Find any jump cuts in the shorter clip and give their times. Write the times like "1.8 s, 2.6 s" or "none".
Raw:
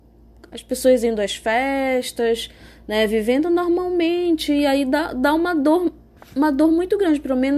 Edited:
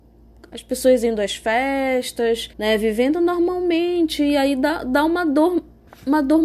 2.5 s